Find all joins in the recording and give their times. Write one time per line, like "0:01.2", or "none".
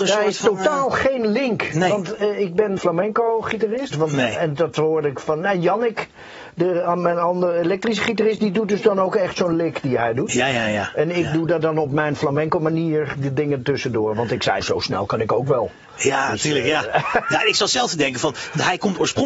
0:02.8
0:03.9
0:14.6